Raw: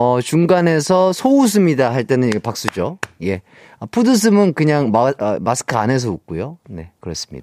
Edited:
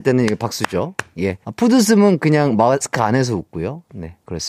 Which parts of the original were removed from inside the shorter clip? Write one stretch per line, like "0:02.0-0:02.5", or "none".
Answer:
0:03.5-0:03.8
0:05.2-0:05.6